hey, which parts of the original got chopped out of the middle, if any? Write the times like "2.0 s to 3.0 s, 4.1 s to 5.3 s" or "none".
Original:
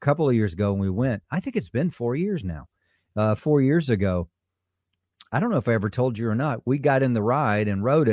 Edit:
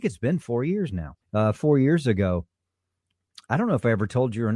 2.7 s to 3.0 s